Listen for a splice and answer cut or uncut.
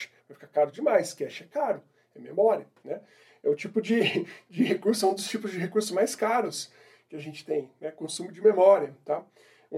uncut